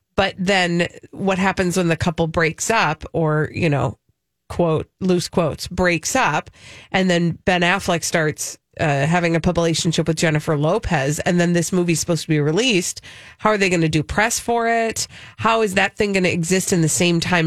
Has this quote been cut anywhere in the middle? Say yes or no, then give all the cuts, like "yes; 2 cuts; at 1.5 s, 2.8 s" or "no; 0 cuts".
no; 0 cuts